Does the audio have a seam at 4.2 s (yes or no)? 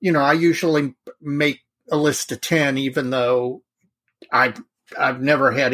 no